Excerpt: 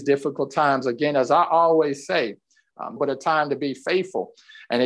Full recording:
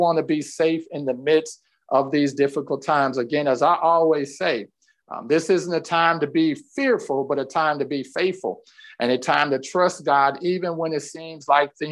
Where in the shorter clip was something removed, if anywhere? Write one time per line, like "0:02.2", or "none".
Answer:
0:03.0

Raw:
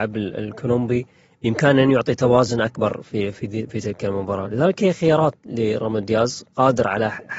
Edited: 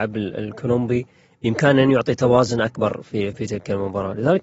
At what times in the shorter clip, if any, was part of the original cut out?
0:03.3

